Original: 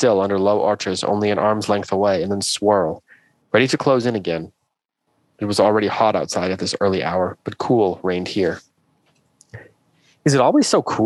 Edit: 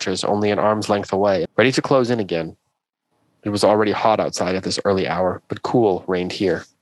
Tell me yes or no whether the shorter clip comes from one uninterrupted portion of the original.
no